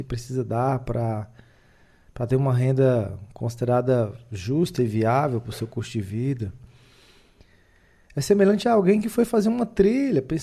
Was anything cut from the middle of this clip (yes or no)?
no